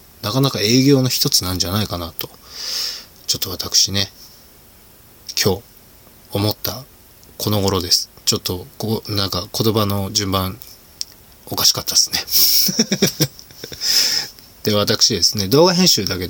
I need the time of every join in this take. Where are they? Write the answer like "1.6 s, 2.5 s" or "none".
none

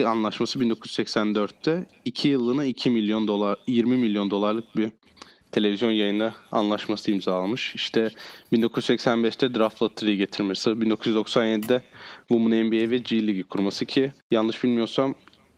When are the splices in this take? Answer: 10.6 s, 14.2 s

